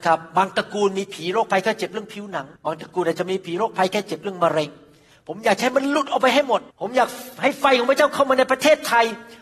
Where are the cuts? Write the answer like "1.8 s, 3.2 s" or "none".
2.6 s, 6.7 s